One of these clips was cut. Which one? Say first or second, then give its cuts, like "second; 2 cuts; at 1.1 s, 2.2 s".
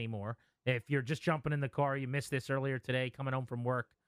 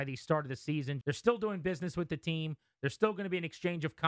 second; 1 cut; at 1.0 s